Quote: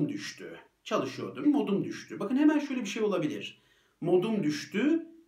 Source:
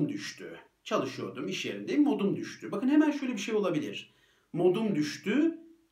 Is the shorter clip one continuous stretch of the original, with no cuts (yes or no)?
no